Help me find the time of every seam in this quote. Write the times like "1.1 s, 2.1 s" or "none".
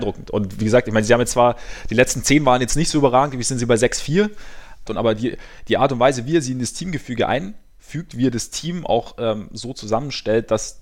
4.9 s